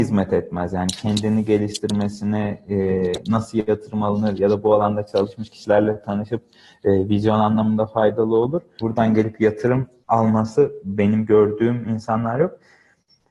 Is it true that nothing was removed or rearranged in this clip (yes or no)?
no